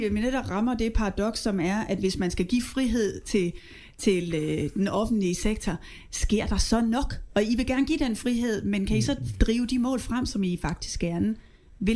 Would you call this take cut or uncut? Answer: uncut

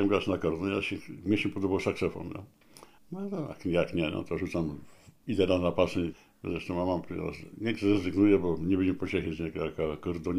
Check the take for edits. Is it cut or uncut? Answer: cut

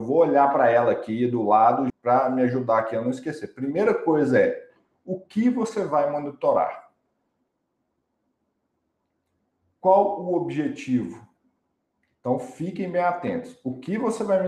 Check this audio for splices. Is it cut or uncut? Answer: cut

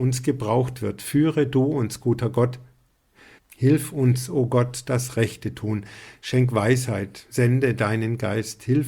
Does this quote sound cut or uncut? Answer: cut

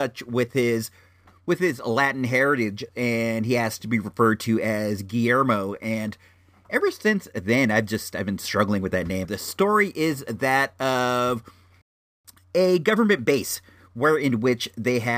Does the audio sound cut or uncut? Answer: cut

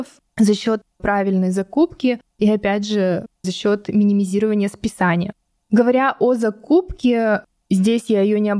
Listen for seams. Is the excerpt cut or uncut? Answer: uncut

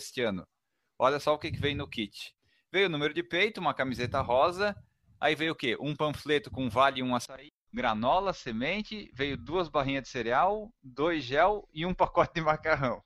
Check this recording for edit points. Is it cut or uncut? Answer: cut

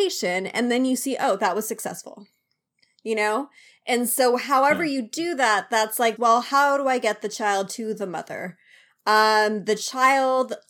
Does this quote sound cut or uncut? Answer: cut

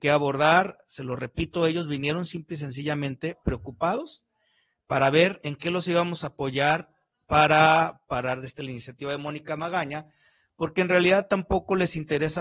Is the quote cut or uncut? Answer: uncut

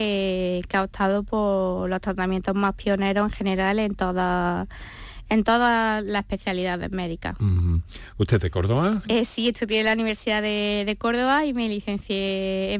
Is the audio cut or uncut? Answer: cut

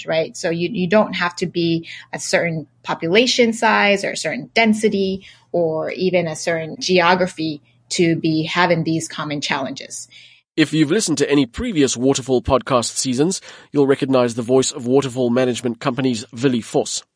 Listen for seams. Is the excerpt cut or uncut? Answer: uncut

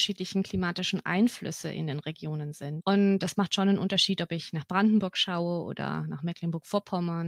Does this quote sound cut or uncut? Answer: cut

